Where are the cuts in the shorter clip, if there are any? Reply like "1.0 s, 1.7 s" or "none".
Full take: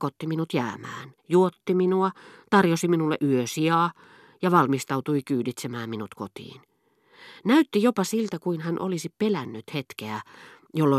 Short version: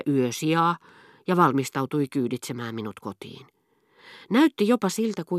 none

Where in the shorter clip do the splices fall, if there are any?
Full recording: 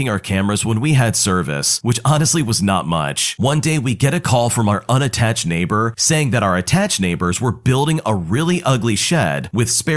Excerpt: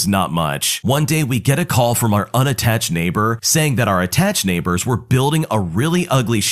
none

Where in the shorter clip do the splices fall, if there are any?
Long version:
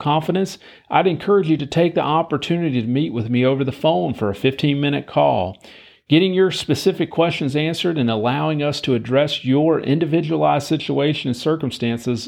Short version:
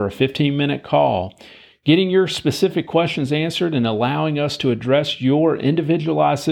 none

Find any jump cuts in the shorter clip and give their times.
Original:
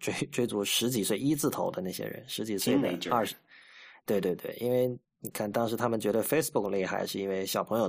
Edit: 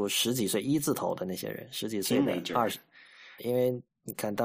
3.4 s

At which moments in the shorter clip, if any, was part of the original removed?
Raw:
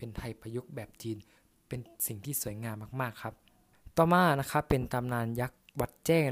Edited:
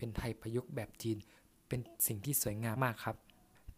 2.8 s

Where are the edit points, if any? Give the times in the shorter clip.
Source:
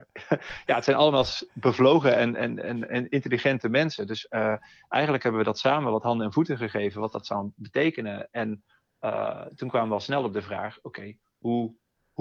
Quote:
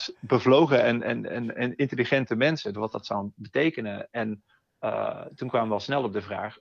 2.7 s

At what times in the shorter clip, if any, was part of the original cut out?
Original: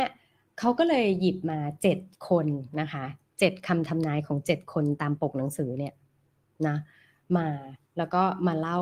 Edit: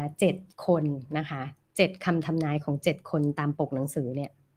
none

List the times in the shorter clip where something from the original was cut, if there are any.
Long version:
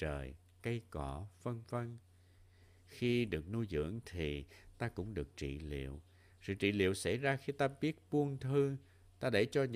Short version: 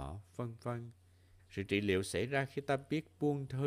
1.4 s

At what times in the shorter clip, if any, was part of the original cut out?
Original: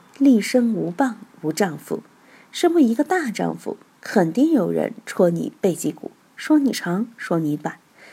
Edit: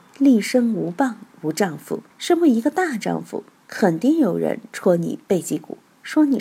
2.1 s

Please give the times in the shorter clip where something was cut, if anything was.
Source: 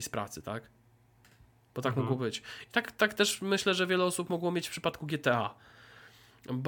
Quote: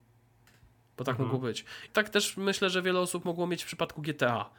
1.9 s

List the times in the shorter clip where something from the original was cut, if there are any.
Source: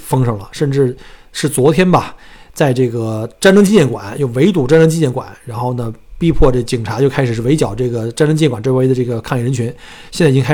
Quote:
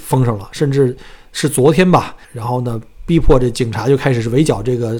2.2 s

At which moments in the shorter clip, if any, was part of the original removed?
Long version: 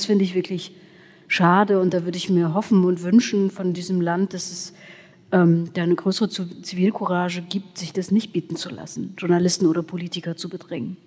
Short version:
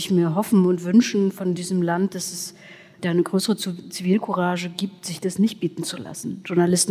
3.0 s

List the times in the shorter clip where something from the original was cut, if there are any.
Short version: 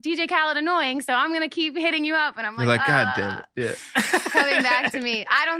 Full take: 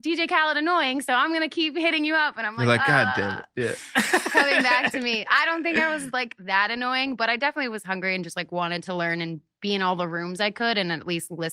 none

